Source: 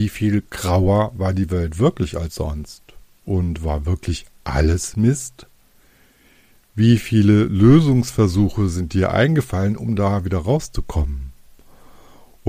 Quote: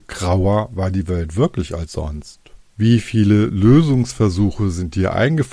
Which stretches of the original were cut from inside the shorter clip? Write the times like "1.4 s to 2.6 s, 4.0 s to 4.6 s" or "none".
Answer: 3.2 s to 6.7 s